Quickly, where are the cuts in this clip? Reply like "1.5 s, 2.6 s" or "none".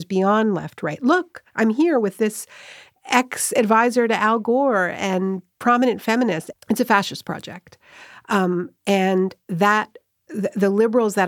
6.5 s